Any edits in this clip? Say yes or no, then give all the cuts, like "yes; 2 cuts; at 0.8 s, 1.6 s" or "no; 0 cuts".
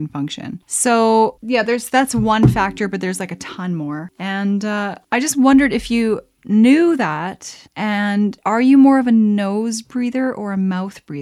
no; 0 cuts